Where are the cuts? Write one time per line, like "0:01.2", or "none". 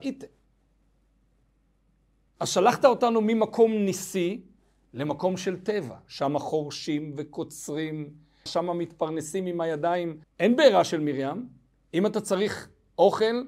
0:08.5
0:10.2